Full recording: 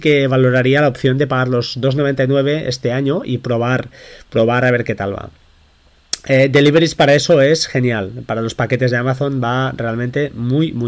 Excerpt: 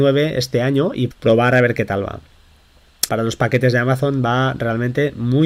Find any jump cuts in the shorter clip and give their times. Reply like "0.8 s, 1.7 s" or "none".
1.1 s, 3.1 s

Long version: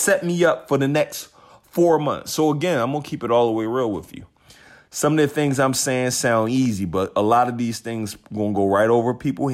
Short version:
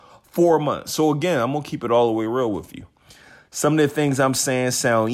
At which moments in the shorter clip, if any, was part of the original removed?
none

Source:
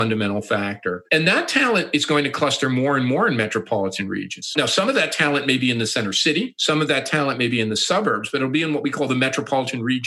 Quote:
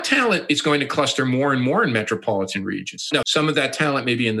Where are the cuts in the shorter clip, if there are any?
3.2 s

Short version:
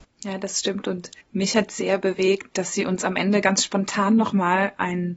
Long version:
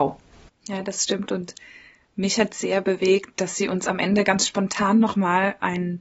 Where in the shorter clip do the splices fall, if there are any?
1.2 s

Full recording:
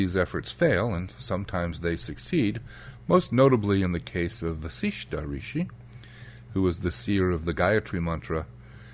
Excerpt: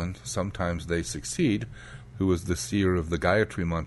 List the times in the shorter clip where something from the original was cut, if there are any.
2.1 s

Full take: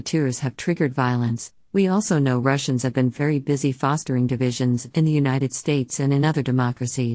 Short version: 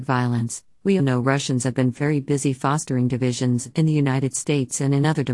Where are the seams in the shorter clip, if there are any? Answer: 1.0 s

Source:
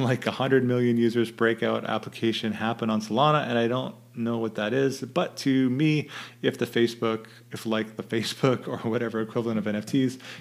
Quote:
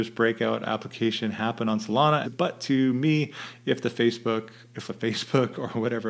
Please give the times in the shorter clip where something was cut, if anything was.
2.2 s, 4.9 s

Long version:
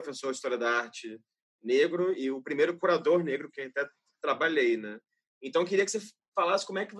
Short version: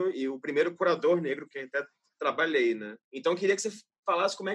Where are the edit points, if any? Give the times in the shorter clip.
3.0 s

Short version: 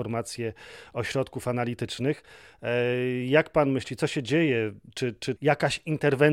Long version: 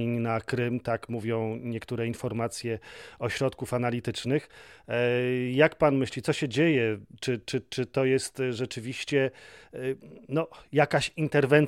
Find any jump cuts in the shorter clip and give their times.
5.4 s

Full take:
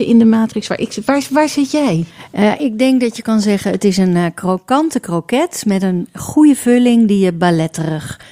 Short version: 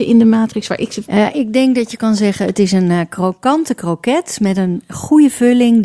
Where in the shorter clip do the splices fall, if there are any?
1.0 s

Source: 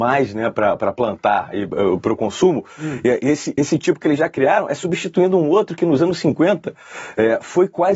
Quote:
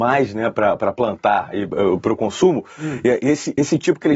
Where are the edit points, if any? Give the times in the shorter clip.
none

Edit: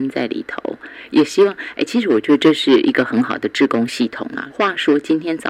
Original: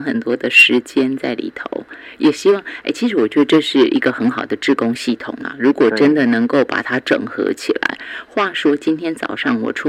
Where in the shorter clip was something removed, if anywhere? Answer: 4.5 s

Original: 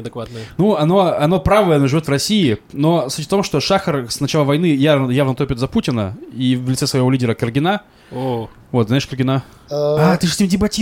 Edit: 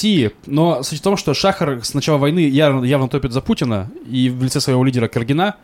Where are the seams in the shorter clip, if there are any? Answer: none

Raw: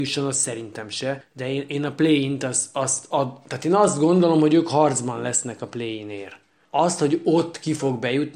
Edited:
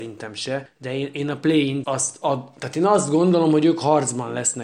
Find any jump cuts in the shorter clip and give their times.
1.8 s

